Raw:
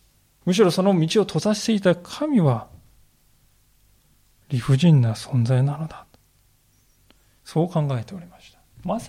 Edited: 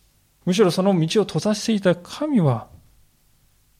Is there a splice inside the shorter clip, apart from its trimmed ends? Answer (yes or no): no